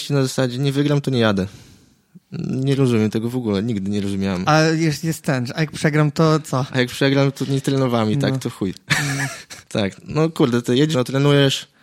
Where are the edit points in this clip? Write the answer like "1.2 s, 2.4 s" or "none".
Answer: 9.6 s, 10.9 s